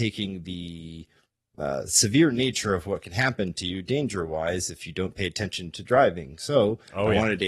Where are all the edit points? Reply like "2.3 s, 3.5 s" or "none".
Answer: none